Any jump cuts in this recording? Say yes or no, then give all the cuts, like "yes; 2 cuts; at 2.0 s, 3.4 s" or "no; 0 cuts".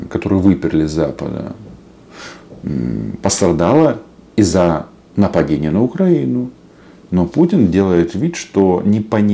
no; 0 cuts